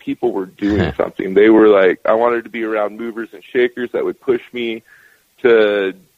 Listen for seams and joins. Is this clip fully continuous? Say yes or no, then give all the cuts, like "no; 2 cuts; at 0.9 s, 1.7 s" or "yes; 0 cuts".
yes; 0 cuts